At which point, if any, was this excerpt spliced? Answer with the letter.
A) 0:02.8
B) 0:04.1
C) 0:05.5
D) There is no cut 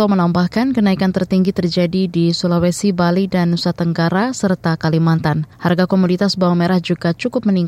C